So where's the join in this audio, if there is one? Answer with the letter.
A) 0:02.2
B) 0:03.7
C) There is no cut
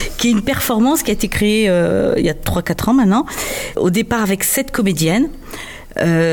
B